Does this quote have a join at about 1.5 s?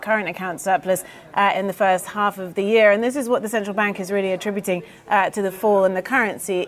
yes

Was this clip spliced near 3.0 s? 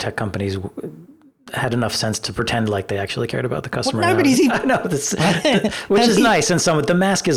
no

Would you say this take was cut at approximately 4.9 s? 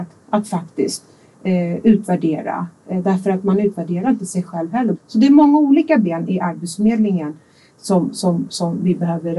yes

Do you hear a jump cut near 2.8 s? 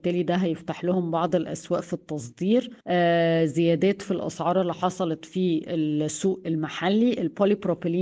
yes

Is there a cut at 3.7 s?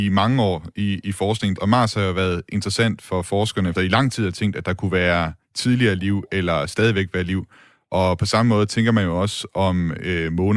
yes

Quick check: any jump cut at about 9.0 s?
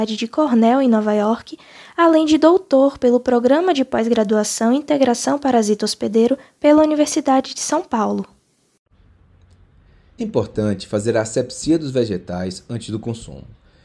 no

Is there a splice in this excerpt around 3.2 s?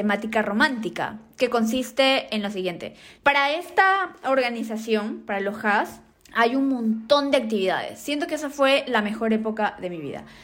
yes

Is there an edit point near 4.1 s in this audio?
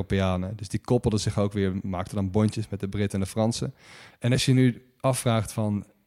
yes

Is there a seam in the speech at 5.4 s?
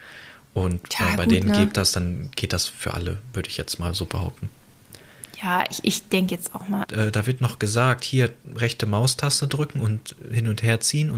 no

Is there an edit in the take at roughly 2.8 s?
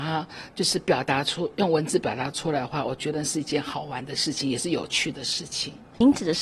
no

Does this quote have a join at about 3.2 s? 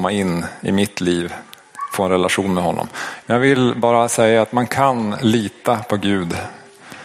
yes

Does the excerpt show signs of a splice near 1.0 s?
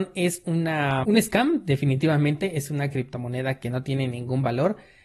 yes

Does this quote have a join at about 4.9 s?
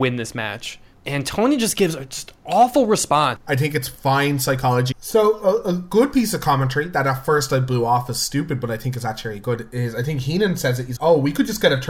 yes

